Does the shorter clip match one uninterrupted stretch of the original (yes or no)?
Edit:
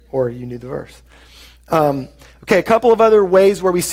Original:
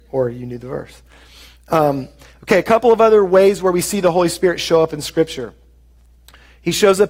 yes